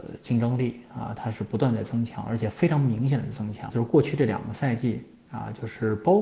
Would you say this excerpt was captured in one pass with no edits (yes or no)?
no